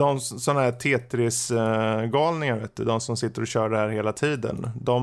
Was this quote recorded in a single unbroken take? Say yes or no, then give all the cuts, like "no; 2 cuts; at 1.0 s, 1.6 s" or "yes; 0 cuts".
yes; 0 cuts